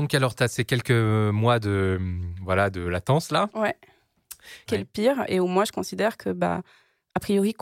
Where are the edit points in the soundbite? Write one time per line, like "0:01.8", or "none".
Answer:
0:04.7